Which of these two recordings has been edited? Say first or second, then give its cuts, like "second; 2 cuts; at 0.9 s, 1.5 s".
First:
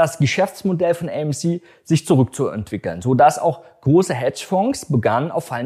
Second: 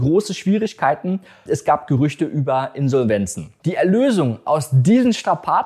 second; 2 cuts; at 1.5 s, 3.6 s